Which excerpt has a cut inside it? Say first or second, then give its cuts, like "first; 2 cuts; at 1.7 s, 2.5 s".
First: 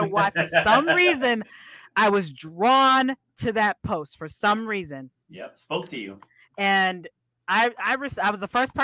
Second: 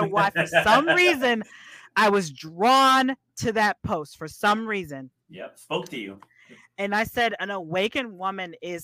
second; 1 cut; at 6.4 s